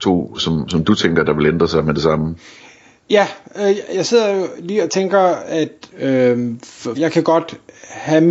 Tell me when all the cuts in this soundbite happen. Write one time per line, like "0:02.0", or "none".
0:03.9
0:05.9
0:06.9